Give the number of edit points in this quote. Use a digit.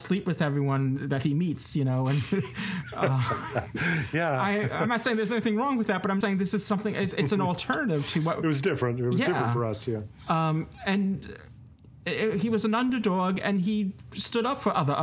1